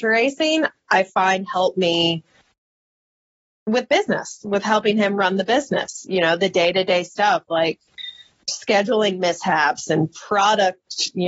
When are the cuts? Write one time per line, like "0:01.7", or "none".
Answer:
none